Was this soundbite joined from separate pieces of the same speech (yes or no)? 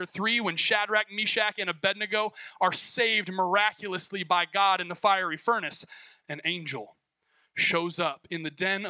no